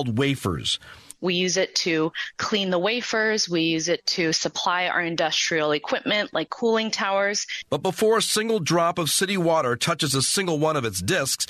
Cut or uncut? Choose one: cut